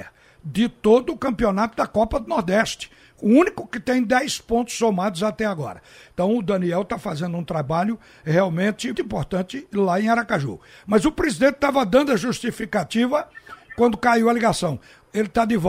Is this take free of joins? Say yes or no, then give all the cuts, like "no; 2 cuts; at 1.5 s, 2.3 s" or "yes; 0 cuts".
no; 1 cut; at 8.9 s